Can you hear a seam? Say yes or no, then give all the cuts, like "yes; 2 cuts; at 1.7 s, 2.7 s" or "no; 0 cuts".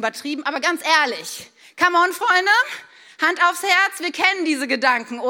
no; 0 cuts